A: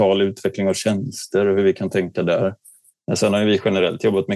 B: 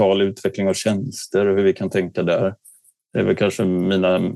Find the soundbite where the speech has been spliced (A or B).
A